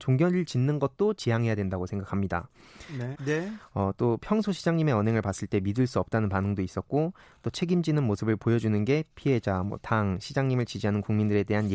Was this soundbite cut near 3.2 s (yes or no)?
yes